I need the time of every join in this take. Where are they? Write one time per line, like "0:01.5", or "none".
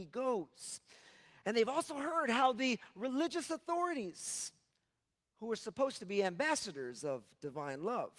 none